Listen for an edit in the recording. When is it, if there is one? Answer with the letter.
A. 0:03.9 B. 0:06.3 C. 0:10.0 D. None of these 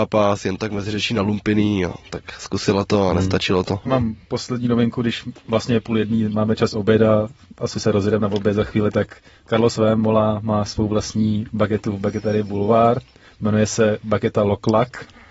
A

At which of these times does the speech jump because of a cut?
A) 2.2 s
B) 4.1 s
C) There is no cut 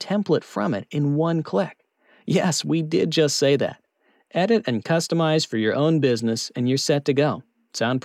C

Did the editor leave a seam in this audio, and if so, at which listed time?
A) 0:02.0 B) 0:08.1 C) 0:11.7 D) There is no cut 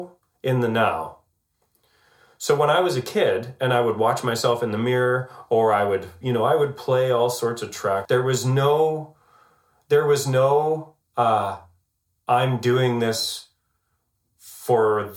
B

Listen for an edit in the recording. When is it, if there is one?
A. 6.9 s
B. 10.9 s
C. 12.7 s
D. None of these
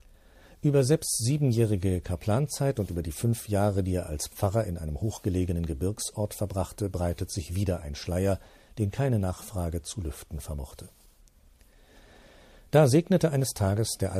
D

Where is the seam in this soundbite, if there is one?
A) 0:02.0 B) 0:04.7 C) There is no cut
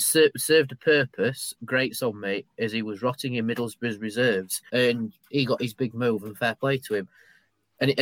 B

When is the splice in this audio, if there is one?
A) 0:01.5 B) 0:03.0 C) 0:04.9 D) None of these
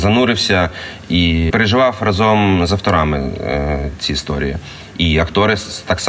A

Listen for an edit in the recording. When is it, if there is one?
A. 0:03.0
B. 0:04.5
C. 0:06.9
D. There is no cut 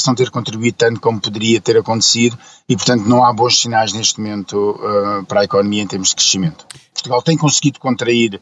C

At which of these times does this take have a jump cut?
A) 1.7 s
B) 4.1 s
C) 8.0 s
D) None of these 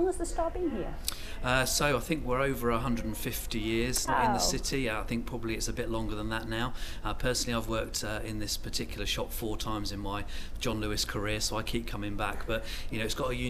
B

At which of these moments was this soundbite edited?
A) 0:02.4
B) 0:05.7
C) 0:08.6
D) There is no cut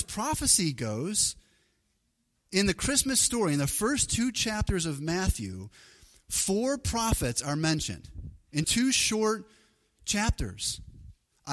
C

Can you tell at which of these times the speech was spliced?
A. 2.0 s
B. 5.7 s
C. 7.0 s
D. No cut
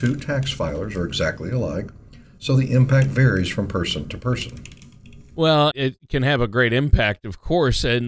B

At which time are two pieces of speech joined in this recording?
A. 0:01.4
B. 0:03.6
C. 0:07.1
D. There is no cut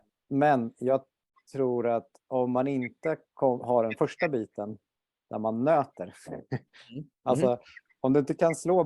D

